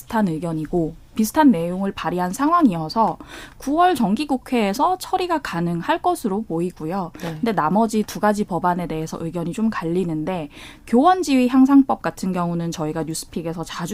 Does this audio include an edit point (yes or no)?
no